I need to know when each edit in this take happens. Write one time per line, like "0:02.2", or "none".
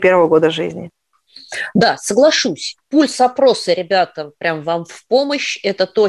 0:02.8

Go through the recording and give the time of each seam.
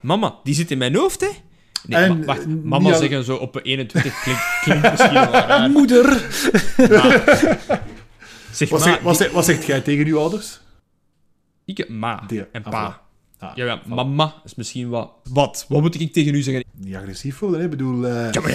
0:15.2
0:16.6

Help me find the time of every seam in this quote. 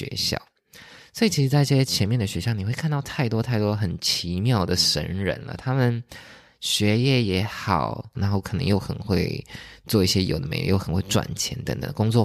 0:08.1

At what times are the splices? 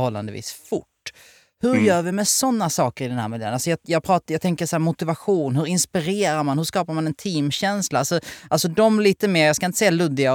none

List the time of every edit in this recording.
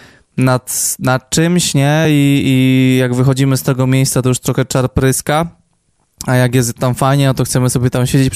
none

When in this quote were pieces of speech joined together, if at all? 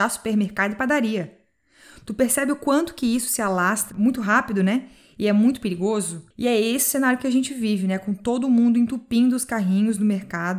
0:06.3

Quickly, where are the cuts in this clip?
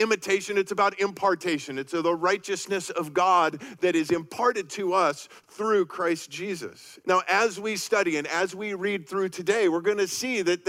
0:07.0

